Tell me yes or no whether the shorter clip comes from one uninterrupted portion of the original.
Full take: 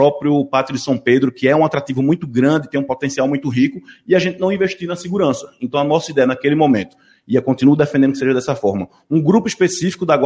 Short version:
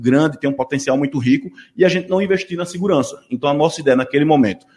yes